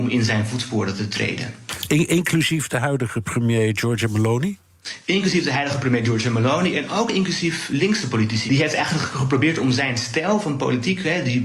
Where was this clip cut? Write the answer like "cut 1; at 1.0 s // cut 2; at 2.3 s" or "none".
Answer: cut 1; at 8.5 s